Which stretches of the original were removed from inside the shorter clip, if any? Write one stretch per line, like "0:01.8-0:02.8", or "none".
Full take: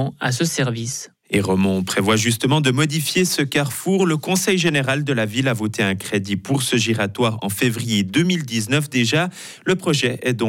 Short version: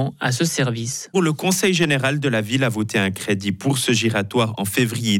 0:01.1-0:04.0